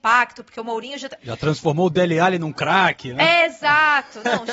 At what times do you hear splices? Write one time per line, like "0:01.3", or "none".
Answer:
0:01.2